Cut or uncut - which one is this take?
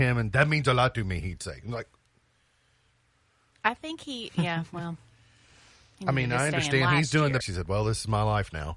cut